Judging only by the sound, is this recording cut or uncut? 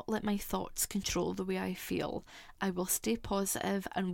cut